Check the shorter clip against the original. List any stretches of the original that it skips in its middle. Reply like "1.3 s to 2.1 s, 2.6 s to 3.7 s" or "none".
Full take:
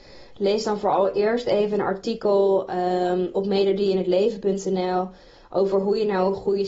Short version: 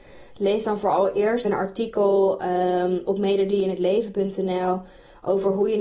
1.4 s to 1.7 s

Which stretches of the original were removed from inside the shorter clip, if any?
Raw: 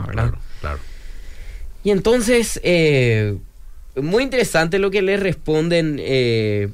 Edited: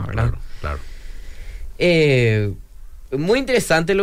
1.8 s to 2.6 s

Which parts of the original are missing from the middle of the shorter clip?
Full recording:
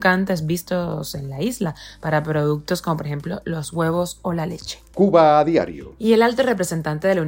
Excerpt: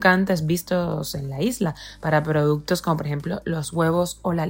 none

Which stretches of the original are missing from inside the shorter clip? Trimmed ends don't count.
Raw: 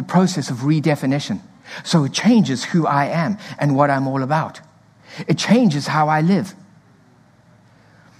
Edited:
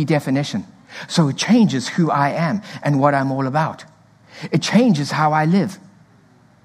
none

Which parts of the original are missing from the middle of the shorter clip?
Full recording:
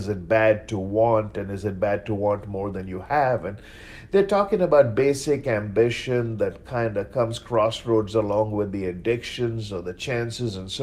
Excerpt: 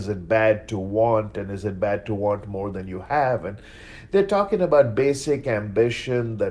none

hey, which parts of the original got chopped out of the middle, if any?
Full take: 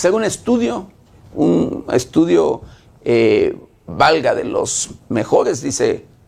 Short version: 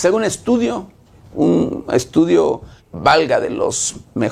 2.8 s to 3.7 s

